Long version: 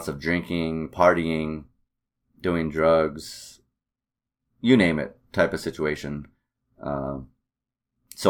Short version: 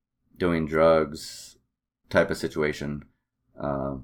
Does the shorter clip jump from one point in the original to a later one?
yes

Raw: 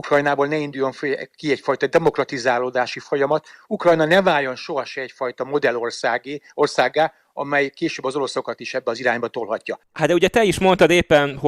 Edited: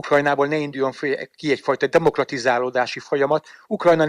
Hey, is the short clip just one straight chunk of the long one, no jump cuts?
yes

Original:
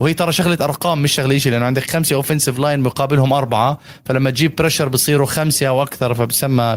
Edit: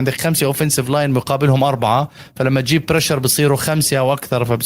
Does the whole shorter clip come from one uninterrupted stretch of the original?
yes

